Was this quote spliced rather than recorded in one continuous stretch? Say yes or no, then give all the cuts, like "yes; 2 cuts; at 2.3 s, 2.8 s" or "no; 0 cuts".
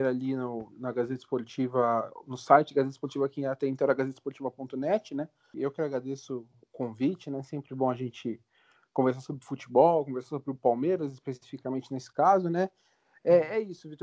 yes; 1 cut; at 5.5 s